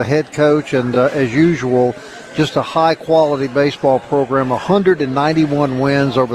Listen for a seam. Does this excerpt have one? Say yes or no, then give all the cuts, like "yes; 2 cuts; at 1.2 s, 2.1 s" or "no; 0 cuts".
no; 0 cuts